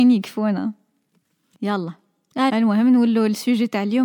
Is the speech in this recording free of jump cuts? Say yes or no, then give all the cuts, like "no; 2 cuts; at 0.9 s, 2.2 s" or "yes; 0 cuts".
no; 1 cut; at 2.5 s